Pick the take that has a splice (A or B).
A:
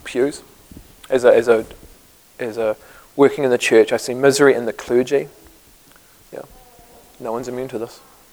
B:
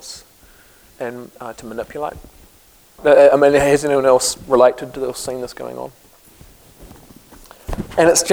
B